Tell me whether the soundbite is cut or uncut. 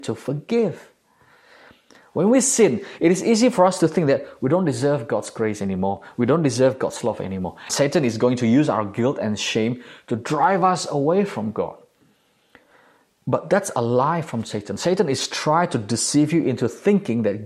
cut